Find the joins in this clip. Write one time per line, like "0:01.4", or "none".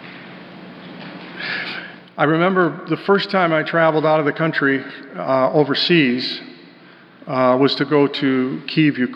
none

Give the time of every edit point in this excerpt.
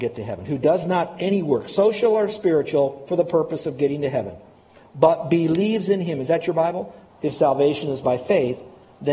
0:07.1

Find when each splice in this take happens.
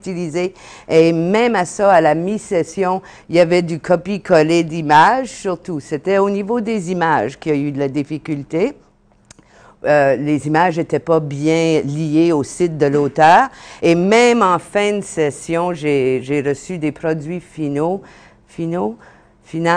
none

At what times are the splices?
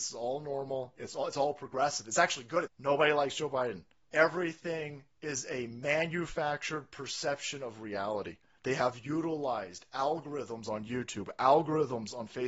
0:02.7
0:04.0

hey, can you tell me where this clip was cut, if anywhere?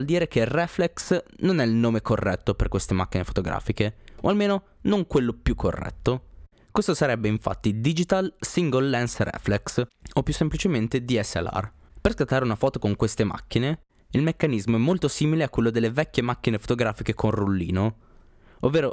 none

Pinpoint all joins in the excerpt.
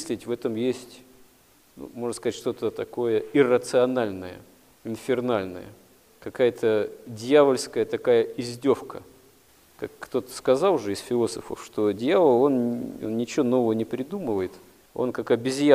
none

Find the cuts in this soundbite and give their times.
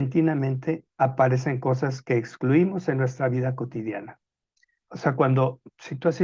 0:04.9

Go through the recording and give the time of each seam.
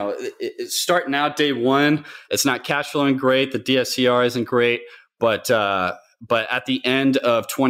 none

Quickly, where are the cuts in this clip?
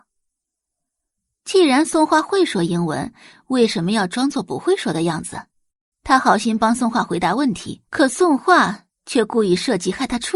0:05.9
0:07.9

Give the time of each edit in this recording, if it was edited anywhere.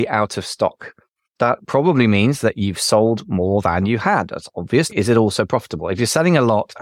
0:04.9

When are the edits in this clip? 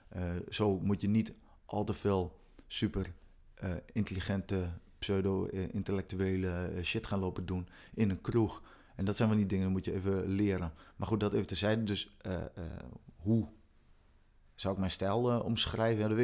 none

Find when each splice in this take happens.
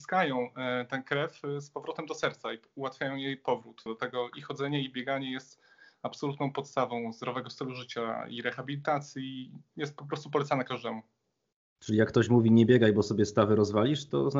0:03.9

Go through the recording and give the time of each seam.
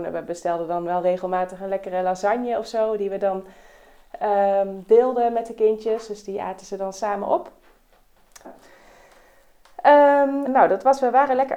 0:08.4
0:10.5

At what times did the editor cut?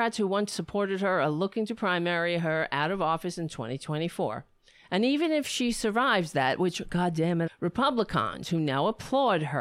0:07.5

